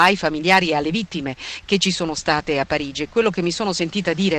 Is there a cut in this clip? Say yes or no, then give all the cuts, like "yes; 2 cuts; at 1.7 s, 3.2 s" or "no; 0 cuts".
no; 0 cuts